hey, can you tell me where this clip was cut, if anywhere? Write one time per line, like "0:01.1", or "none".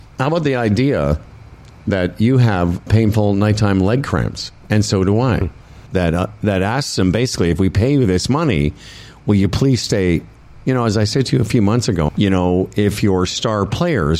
0:02.9
0:05.9
0:12.1